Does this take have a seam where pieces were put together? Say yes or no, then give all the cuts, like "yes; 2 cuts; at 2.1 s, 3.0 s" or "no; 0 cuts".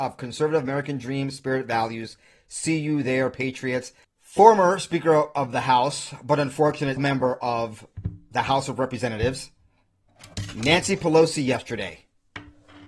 yes; 2 cuts; at 4.0 s, 7.0 s